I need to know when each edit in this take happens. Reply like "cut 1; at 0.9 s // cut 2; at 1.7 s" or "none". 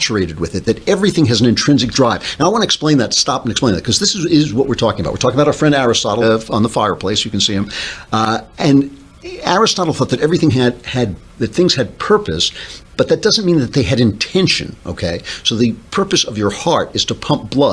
cut 1; at 6.2 s